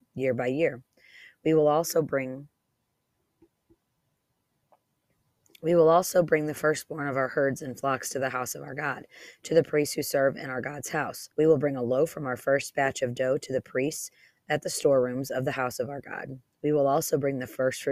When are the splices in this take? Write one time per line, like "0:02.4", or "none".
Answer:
0:11.3